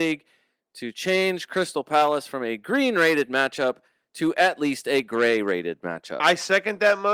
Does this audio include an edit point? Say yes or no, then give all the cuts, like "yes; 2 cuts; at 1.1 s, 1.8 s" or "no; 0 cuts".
no; 0 cuts